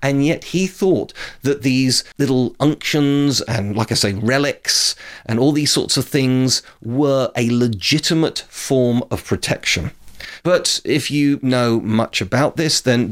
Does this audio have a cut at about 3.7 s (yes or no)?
no